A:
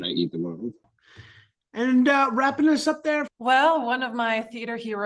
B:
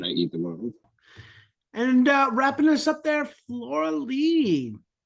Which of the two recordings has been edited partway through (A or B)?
A